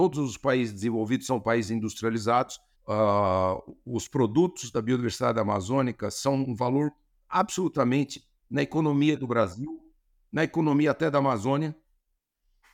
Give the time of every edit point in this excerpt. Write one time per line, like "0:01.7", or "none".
0:02.7
0:08.5